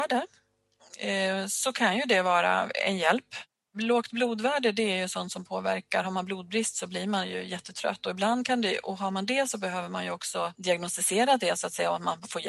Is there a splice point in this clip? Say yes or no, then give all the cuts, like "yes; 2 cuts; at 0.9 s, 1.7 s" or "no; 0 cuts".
no; 0 cuts